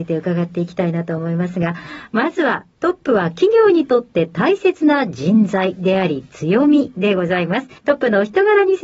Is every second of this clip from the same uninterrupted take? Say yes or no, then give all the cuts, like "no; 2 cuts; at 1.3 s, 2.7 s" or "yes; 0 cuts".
no; 1 cut; at 7.8 s